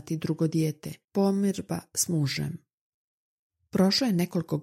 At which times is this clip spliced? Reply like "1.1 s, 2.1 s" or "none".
1.0 s